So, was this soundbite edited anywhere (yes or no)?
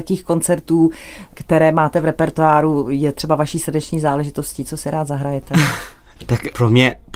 no